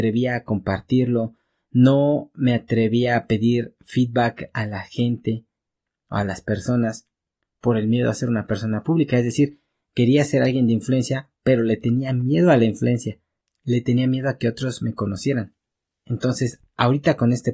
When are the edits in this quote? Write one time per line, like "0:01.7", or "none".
none